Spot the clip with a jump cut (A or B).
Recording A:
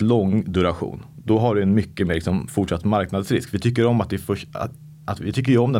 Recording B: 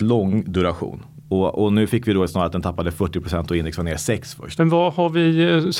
B